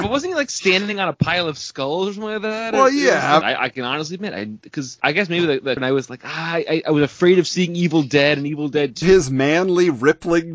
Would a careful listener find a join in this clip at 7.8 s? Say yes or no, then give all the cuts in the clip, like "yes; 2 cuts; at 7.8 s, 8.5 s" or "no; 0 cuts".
no; 3 cuts; at 3.4 s, 5.8 s, 9.0 s